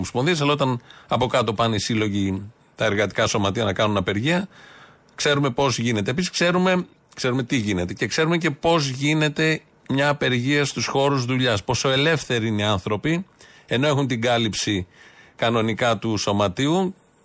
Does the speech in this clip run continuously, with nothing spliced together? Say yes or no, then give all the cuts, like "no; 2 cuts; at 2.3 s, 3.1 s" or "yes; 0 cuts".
yes; 0 cuts